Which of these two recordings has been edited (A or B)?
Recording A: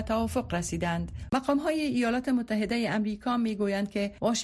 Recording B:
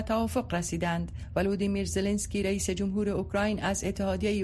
A